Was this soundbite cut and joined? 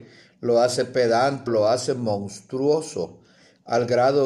yes; 1 cut; at 1.5 s

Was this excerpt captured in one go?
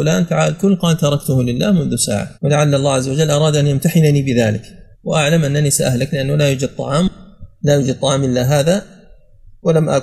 no; 2 cuts; at 2.3 s, 4.9 s

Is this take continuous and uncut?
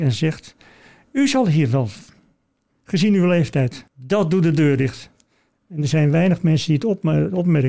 no; 3 cuts; at 2.7 s, 3.9 s, 5.5 s

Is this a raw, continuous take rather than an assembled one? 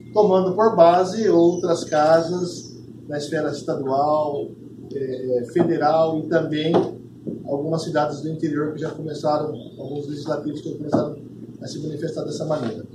yes; 0 cuts

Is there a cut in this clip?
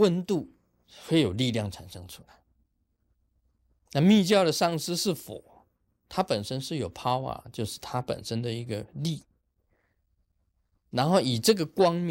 no; 0 cuts

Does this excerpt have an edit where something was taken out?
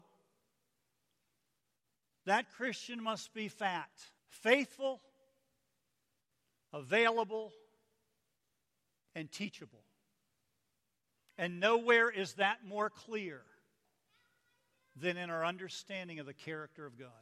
yes; 2 cuts; at 4.2 s, 11.2 s

